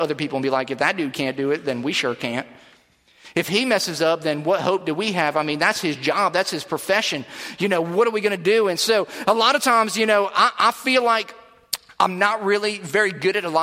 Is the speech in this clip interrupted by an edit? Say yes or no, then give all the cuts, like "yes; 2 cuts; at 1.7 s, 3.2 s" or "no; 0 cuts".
no; 0 cuts